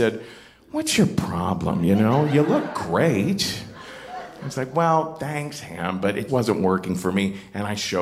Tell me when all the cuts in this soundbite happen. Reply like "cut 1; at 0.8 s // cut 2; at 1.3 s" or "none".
cut 1; at 6.3 s